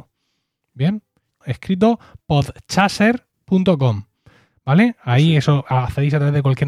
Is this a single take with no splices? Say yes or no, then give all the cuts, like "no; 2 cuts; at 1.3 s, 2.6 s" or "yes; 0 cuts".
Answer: no; 1 cut; at 1.4 s